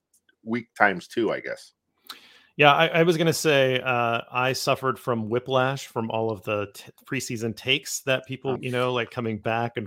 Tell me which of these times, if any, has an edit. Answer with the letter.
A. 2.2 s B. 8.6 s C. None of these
B